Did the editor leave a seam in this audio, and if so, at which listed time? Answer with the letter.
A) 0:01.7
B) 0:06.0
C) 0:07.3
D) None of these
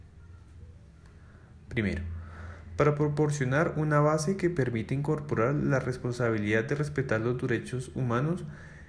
A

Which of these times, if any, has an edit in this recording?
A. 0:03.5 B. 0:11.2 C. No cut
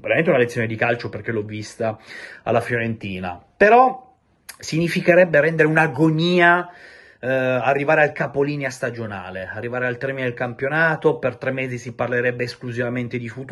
C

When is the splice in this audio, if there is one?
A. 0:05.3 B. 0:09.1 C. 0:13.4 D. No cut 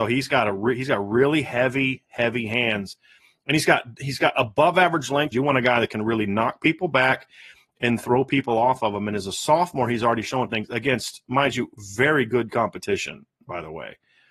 A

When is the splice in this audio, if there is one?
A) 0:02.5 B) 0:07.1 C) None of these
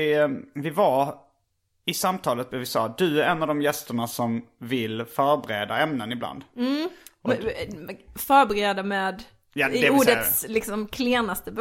A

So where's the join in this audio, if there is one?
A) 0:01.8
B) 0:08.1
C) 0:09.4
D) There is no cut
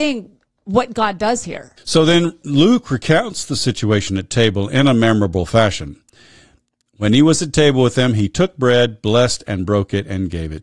A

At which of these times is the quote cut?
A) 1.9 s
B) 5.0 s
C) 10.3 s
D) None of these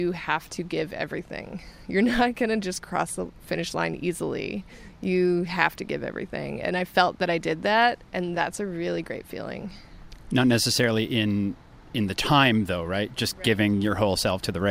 D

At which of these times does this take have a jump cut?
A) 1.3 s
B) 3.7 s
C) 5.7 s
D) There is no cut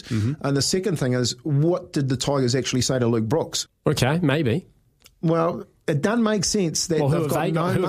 B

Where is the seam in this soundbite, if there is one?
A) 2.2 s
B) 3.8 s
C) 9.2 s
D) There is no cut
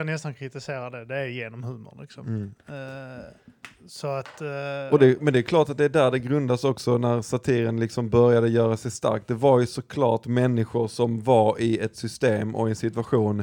D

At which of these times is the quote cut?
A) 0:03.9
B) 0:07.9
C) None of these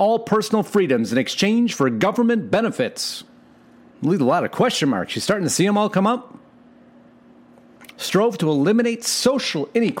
A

